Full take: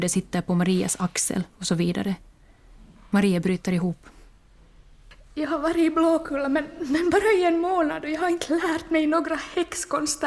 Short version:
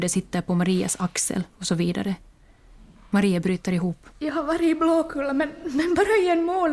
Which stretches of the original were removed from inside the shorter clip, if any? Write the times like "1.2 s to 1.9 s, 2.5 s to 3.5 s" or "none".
4.1 s to 5.3 s